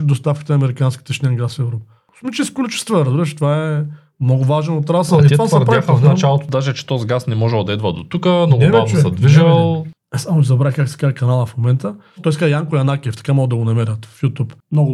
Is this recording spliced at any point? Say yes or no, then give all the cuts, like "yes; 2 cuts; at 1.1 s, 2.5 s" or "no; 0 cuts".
yes; 1 cut; at 10.0 s